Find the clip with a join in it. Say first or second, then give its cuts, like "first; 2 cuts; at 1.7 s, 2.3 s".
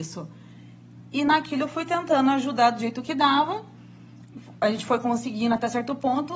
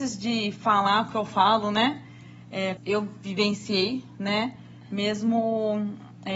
second; 1 cut; at 2.8 s